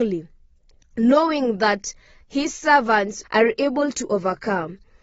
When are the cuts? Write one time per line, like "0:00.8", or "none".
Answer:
0:03.2